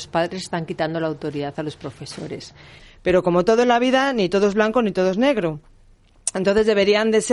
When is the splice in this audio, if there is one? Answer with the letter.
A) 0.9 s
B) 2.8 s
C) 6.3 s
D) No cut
B